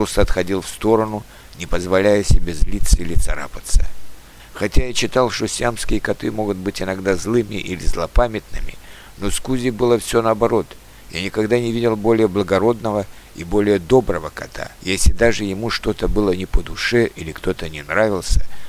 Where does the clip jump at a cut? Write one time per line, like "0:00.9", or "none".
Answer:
0:04.4
0:14.7